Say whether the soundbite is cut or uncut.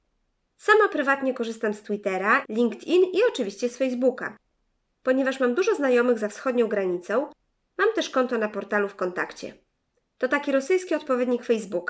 cut